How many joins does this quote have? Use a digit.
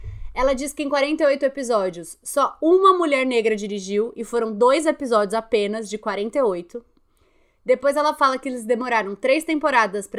0